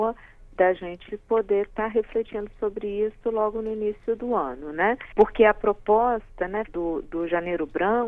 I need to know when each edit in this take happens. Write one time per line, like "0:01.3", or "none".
0:05.1
0:06.7